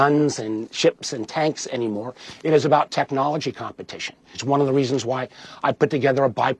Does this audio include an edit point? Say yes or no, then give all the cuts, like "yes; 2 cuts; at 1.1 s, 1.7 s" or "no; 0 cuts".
yes; 1 cut; at 4.3 s